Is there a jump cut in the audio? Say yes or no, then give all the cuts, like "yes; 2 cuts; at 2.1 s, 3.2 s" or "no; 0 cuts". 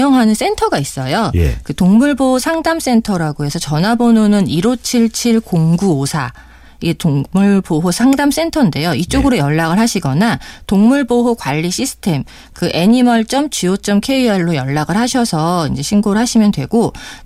no; 0 cuts